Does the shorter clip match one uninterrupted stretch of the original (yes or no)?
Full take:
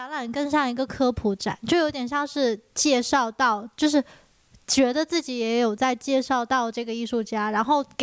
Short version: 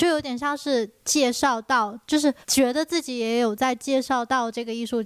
no